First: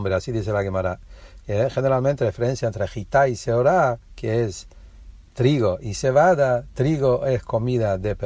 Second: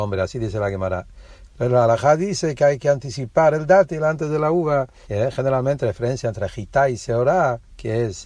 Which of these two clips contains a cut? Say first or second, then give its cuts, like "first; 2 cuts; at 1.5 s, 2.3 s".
second; 2 cuts; at 1.5 s, 5.0 s